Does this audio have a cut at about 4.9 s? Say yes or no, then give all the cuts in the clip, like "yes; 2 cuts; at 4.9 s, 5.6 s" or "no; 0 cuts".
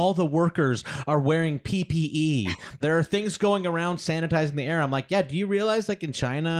no; 1 cut; at 2.8 s